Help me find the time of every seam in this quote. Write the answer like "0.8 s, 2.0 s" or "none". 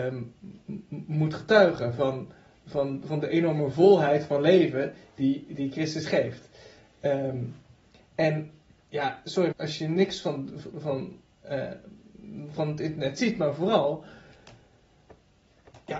9.5 s, 10.7 s